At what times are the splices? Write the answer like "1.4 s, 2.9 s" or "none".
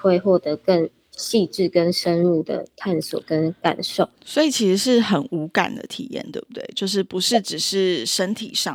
none